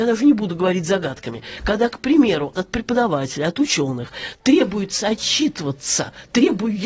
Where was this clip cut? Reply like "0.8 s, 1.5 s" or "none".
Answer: 2.6 s